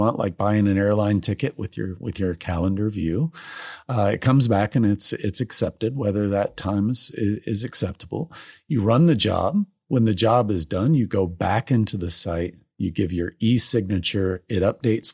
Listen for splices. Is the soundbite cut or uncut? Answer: uncut